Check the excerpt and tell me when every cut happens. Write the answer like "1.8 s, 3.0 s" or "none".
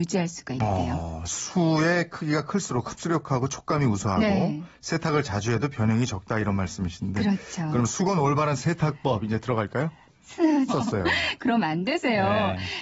10.7 s